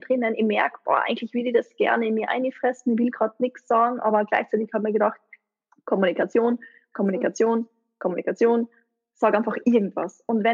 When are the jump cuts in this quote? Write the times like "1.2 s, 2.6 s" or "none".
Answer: none